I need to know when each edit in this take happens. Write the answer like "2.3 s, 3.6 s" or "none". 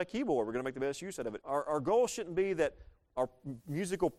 1.4 s